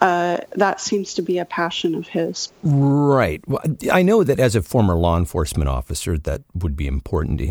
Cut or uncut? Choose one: cut